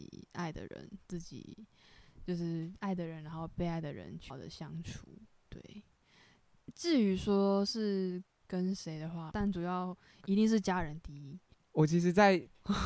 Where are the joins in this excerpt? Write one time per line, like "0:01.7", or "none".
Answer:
0:04.3
0:09.3
0:11.5